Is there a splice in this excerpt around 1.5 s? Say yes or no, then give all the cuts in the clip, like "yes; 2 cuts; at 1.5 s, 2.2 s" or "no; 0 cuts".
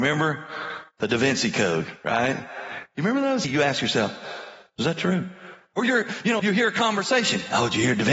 no; 2 cuts; at 3.4 s, 6.4 s